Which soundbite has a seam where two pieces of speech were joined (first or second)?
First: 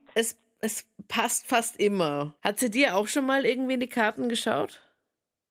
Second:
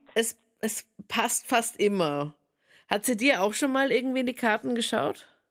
first